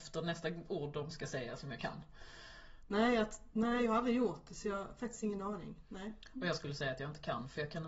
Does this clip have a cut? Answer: yes; 1 cut; at 2.8 s

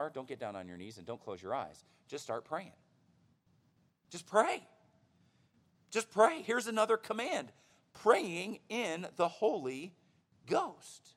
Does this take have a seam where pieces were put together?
no; 0 cuts

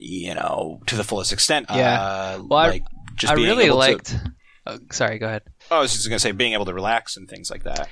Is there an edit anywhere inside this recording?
yes; 2 cuts; at 1.6 s, 5.6 s

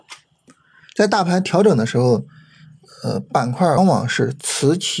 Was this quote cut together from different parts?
yes; 1 cut; at 3.8 s

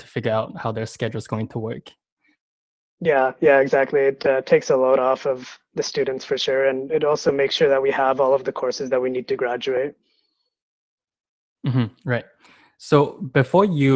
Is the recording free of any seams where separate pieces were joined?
yes; 0 cuts

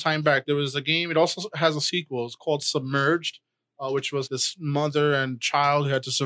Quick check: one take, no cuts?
no; 1 cut; at 4.3 s

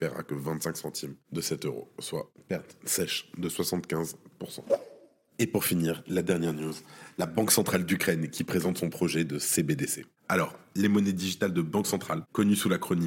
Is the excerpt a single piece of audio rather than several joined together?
no; 1 cut; at 2.8 s

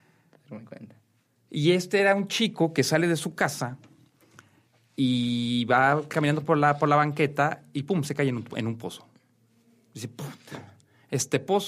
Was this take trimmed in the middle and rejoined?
no; 0 cuts

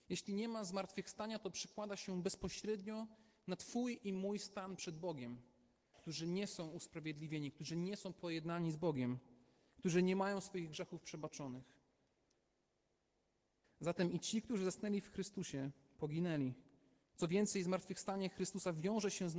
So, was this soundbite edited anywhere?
yes; 3 cuts; at 5.9 s, 13.6 s, 17.0 s

